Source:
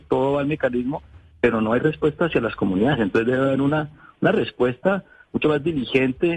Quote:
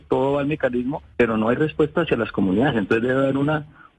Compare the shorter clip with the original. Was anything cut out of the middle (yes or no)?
yes